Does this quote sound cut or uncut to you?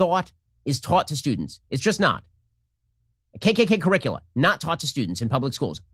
uncut